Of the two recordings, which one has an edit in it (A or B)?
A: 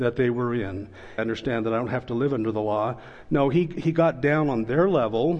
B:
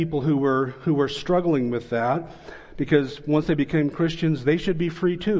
A